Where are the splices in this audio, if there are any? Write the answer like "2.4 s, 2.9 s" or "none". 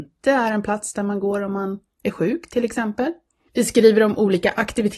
3.5 s